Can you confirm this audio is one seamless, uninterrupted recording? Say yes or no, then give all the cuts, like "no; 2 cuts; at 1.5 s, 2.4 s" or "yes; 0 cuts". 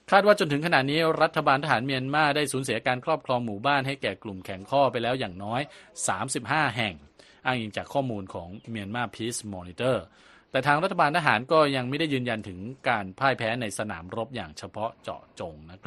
yes; 0 cuts